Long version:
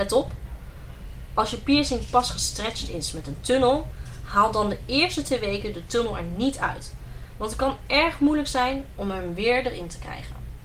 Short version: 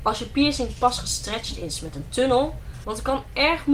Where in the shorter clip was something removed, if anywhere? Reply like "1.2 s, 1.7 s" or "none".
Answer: 2.8 s